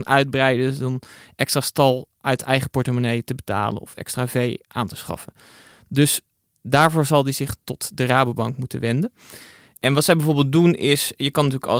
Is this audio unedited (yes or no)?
yes